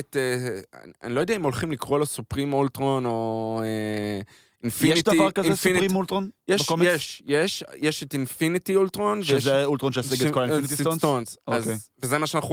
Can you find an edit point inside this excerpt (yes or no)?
no